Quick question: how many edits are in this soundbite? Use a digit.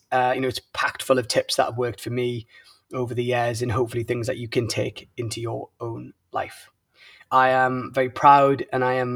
1